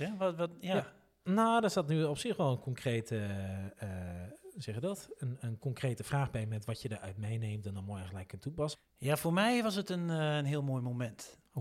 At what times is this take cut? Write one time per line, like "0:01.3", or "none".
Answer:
0:08.7